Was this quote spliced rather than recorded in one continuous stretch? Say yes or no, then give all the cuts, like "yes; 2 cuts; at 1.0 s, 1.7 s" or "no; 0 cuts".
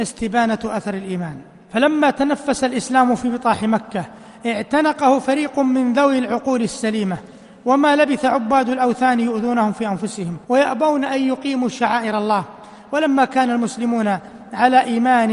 yes; 1 cut; at 10.4 s